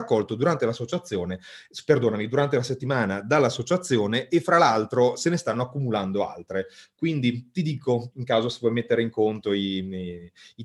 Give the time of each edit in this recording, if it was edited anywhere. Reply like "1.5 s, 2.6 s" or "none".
8.1 s